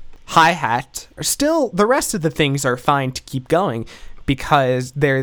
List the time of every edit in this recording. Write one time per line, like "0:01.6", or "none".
0:01.2